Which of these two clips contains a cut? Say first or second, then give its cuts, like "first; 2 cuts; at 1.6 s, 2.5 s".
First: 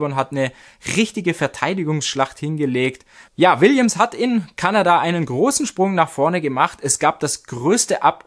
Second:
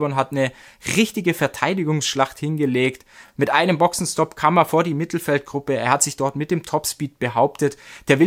first; 1 cut; at 3.3 s